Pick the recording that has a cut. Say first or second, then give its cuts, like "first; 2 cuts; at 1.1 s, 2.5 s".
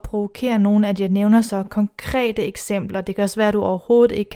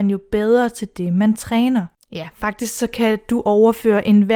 second; 1 cut; at 2.0 s